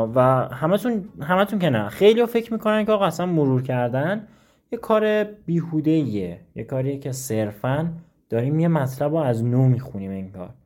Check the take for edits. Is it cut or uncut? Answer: uncut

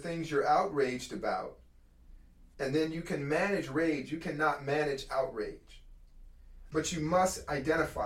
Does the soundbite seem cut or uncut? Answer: cut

